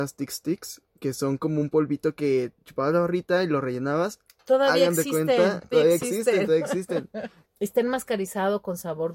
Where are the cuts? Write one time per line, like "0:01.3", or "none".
0:05.7
0:07.4